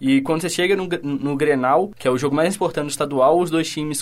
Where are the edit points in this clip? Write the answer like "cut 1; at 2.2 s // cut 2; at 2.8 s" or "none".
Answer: none